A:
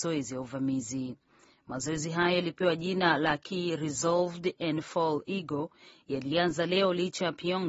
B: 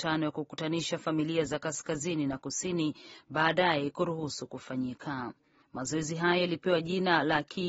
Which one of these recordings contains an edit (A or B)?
B